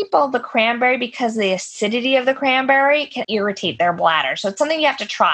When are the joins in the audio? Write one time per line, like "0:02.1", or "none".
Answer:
0:03.2